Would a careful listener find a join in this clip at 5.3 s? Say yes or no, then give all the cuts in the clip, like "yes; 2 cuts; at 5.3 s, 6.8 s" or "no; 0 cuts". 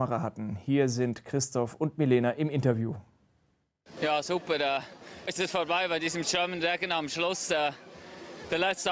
yes; 1 cut; at 5.3 s